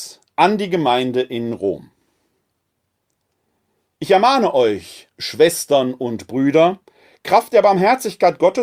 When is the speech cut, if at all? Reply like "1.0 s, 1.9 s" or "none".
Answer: none